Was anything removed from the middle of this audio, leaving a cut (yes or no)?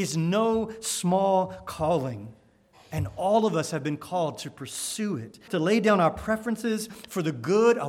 yes